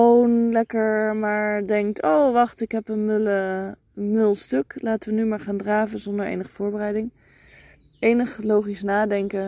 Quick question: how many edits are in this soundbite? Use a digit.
0